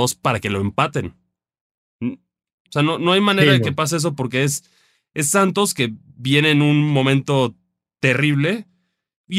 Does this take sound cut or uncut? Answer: cut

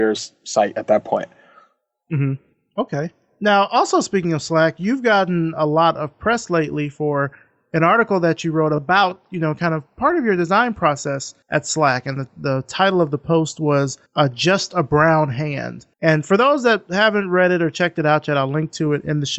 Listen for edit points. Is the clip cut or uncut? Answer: cut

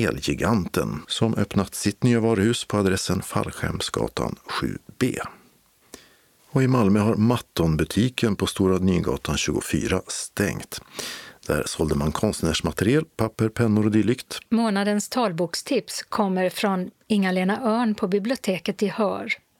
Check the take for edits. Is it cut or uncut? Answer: cut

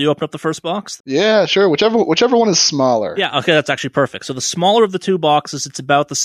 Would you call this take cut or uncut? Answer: cut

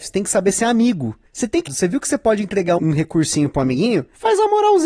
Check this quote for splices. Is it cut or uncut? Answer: cut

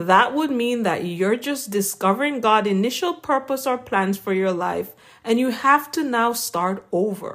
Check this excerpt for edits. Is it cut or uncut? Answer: uncut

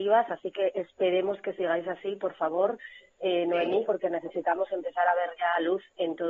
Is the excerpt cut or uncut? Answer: cut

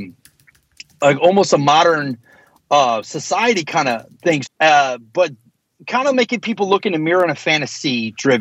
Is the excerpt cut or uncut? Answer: cut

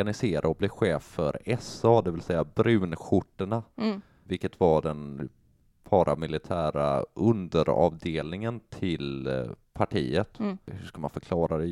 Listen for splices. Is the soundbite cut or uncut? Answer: uncut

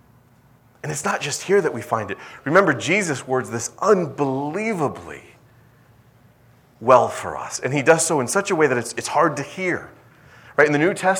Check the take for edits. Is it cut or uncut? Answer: uncut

